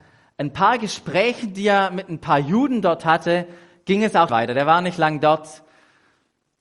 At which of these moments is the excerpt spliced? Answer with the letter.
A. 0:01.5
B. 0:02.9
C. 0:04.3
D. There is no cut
C